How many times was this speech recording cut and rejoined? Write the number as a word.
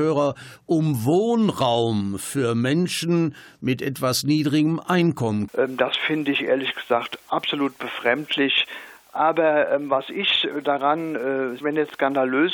three